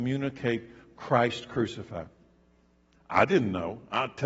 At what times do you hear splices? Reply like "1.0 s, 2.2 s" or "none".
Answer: 2.9 s